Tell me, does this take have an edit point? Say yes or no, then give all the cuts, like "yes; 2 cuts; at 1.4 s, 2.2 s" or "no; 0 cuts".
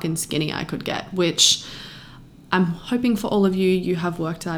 no; 0 cuts